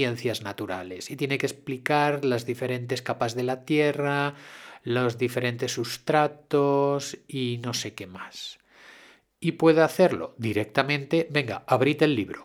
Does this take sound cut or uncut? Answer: uncut